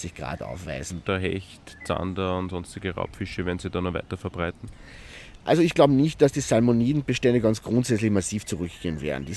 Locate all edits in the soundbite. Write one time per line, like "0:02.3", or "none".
0:01.0